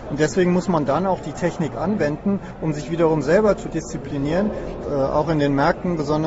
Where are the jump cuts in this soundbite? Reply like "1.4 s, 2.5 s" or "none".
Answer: 4.8 s

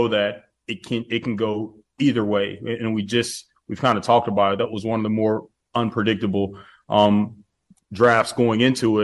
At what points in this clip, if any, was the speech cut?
none

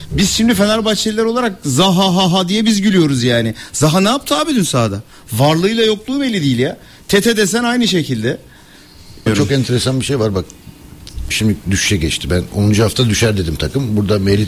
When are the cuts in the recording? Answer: 9.3 s, 11.3 s

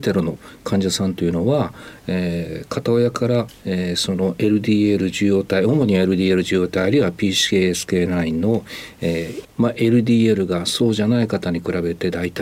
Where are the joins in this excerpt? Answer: 9.4 s

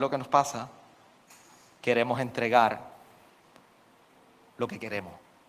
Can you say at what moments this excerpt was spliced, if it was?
none

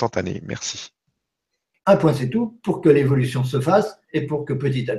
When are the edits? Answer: 1.8 s

